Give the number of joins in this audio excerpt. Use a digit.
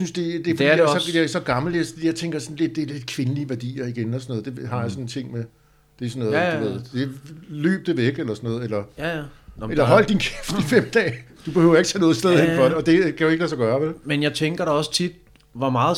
0